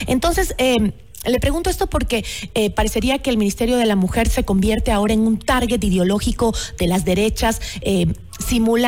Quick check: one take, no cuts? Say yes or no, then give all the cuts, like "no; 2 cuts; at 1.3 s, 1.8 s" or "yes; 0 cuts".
yes; 0 cuts